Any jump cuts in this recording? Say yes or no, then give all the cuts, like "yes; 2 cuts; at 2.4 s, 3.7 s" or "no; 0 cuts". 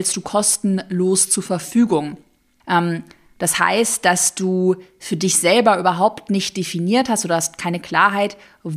yes; 1 cut; at 2.6 s